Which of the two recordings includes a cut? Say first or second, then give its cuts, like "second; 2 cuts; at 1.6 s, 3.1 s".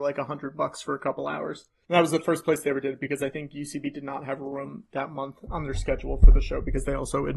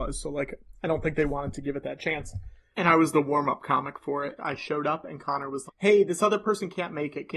second; 2 cuts; at 4.4 s, 5.7 s